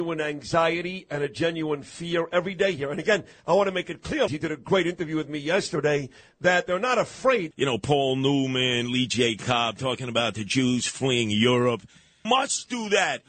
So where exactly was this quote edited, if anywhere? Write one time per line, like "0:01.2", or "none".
0:04.3
0:07.5
0:12.2